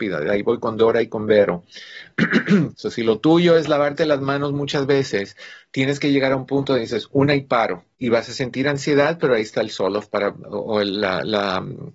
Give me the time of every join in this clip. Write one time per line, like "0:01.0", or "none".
0:02.7
0:07.9